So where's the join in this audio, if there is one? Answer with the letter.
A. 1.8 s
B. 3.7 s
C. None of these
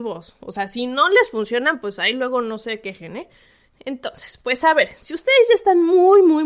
B